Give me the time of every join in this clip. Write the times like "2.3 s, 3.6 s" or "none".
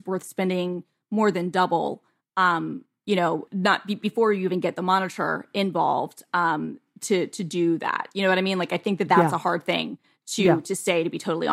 3.5 s